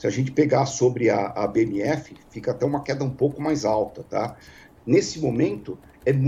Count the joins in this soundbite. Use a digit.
1